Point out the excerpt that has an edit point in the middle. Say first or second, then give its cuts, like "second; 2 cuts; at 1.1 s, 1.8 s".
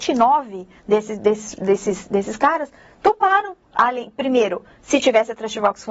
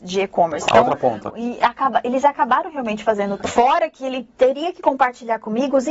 second; 2 cuts; at 1.3 s, 3.4 s